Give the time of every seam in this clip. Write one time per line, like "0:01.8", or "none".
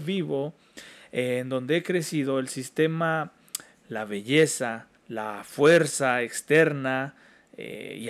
0:03.7
0:05.0